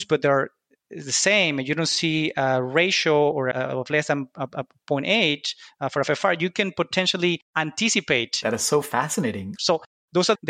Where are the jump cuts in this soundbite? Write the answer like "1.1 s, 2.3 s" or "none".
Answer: 8.4 s, 9.6 s